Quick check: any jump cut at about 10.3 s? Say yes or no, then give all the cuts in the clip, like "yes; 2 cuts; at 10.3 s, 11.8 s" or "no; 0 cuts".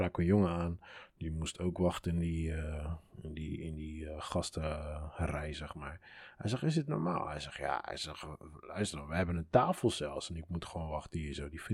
no; 0 cuts